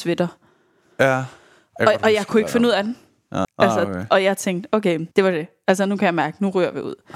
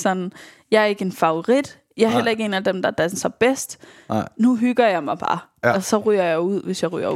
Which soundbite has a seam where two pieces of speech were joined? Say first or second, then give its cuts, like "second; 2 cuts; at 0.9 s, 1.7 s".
first; 2 cuts; at 3.4 s, 5.1 s